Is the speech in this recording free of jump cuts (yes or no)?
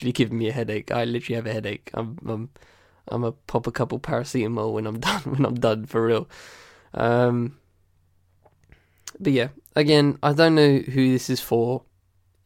yes